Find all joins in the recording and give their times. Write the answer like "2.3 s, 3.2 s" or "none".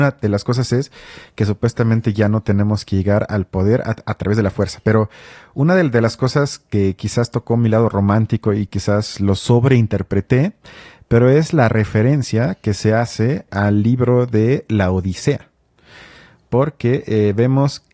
13.5 s